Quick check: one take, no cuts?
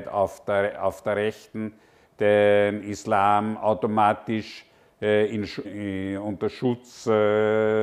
no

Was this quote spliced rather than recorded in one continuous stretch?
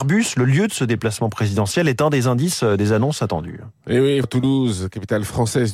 yes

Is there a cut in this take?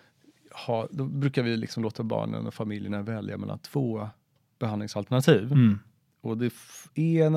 no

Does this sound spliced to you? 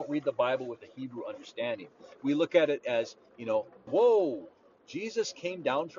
yes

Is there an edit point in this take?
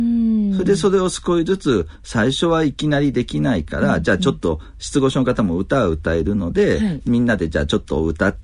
no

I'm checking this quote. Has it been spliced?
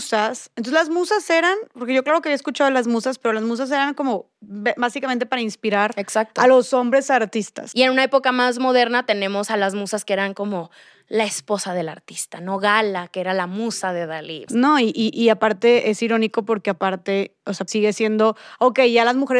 yes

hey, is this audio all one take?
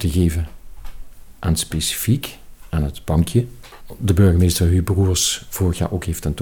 yes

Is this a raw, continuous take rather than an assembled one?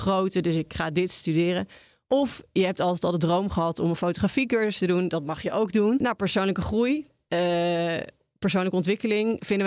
no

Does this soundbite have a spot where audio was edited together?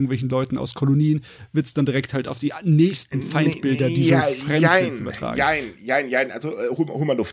no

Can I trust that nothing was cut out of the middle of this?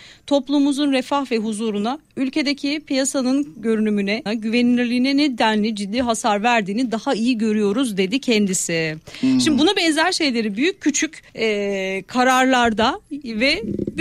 no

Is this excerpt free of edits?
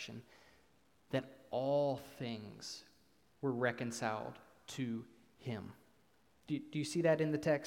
yes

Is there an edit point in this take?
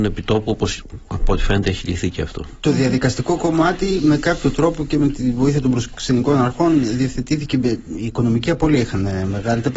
no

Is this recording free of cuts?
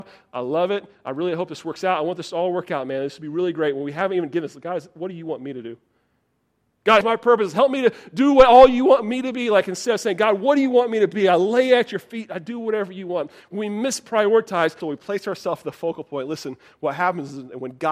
no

